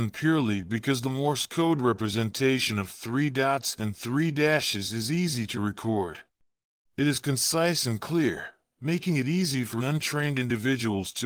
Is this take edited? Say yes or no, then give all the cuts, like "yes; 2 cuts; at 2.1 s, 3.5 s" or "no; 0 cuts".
yes; 2 cuts; at 6.8 s, 9.8 s